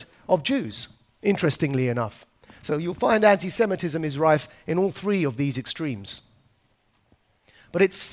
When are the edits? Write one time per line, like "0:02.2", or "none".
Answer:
none